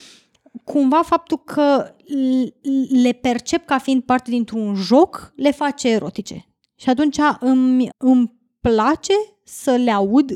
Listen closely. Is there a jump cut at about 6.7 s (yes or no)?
no